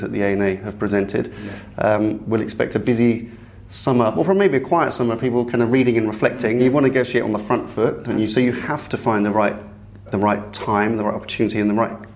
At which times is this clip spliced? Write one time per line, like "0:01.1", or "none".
0:06.6
0:10.1